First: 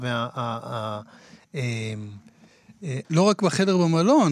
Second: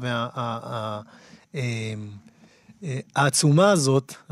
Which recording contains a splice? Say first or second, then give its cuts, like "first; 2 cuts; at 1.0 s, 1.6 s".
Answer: first; 1 cut; at 3.0 s